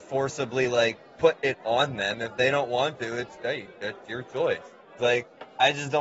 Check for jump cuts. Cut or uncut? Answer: cut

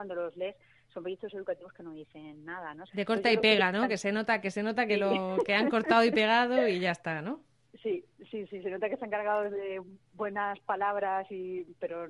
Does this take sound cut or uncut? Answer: cut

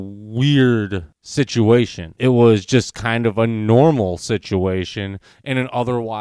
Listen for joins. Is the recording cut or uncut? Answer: uncut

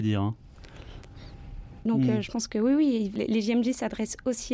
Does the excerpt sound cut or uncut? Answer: cut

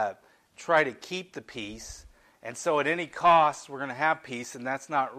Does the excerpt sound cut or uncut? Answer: uncut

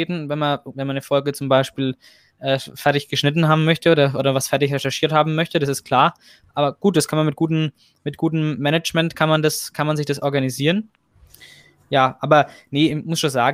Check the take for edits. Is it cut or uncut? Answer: uncut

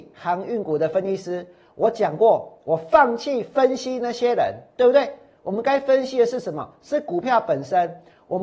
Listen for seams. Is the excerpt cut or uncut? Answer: uncut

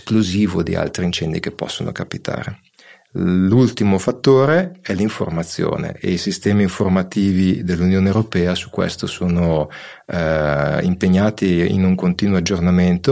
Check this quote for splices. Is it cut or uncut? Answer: uncut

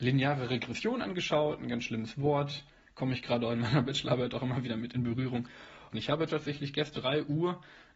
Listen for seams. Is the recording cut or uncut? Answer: cut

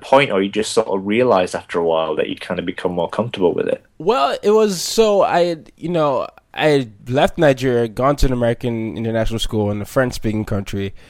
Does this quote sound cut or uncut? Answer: cut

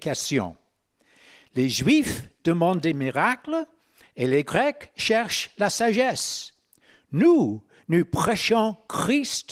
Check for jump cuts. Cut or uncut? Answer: uncut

